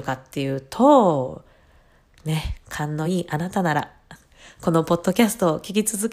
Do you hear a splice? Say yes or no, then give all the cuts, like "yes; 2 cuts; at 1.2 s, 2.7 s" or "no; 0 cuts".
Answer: no; 0 cuts